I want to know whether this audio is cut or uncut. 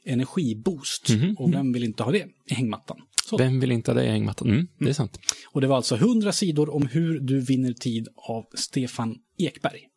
uncut